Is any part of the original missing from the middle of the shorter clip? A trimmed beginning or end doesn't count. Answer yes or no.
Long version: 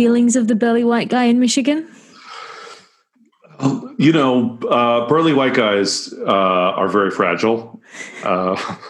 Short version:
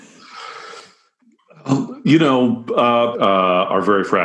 yes